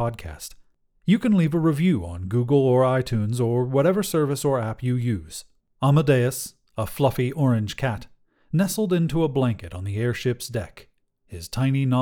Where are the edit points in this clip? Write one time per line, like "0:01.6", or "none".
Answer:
0:05.6